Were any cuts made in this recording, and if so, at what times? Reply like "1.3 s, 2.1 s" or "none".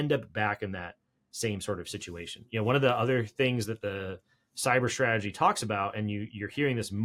none

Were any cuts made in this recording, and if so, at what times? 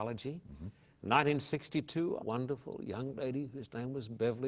2.2 s

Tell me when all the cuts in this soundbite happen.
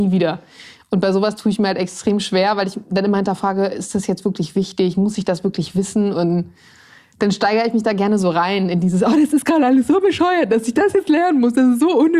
6.1 s

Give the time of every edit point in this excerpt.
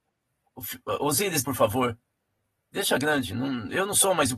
1.4 s

